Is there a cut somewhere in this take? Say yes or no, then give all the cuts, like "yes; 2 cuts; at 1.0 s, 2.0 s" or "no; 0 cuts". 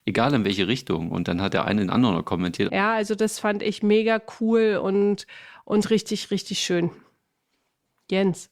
yes; 1 cut; at 2.7 s